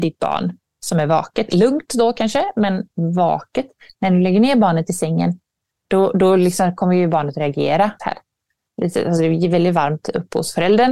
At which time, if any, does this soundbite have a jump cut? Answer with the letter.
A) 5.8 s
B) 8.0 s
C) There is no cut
B